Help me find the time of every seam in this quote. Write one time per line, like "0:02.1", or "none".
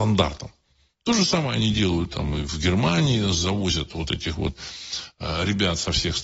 none